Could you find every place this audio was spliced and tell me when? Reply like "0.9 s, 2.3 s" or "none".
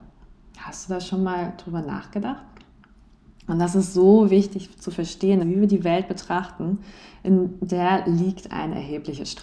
3.4 s, 5.4 s